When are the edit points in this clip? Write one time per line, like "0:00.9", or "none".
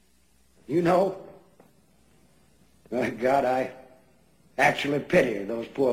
none